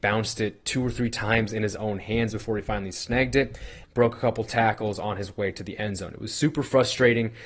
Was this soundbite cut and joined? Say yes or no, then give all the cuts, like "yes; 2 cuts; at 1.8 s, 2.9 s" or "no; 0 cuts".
yes; 1 cut; at 3.8 s